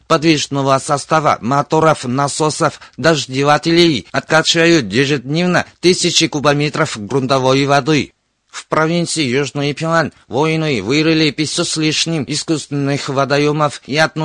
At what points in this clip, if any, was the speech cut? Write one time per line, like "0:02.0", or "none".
none